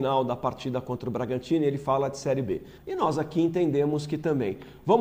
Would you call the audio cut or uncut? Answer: cut